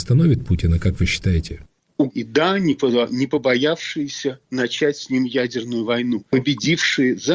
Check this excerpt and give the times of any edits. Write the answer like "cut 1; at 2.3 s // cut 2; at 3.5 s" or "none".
cut 1; at 2.1 s // cut 2; at 6.2 s